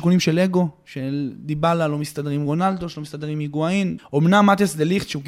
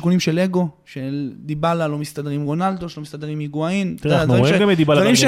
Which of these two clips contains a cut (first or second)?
first